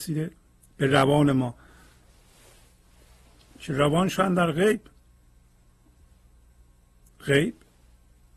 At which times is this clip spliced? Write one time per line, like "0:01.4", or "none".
none